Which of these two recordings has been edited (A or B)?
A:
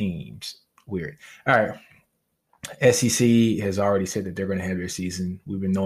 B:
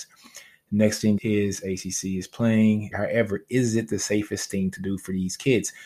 B